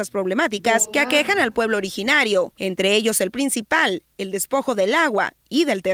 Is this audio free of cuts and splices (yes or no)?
yes